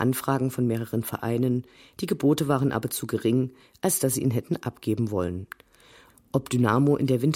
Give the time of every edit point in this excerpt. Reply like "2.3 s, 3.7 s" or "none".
none